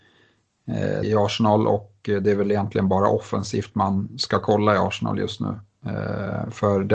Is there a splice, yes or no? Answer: yes